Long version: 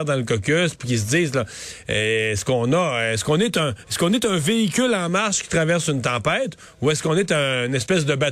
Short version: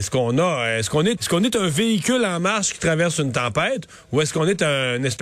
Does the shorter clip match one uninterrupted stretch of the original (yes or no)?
no